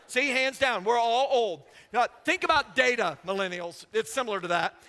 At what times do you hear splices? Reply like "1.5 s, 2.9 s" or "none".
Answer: none